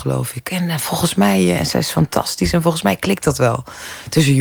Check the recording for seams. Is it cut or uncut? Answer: cut